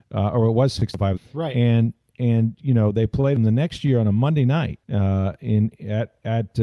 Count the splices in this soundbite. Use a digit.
2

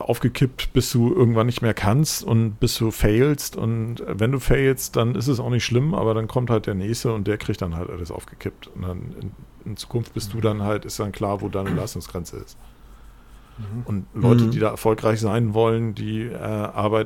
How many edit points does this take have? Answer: 0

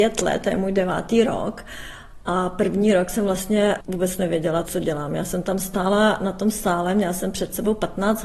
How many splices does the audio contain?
0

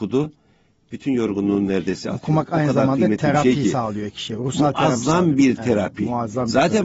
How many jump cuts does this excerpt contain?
0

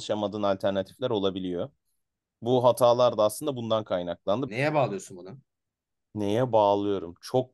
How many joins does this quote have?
1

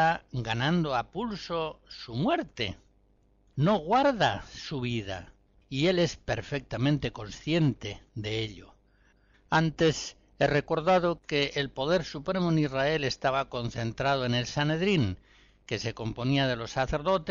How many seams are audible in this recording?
2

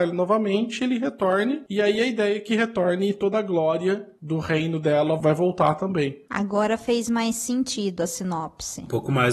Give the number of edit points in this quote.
0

